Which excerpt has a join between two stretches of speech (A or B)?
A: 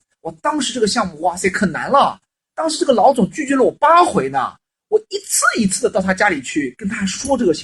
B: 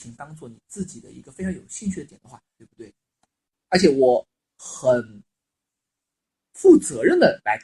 B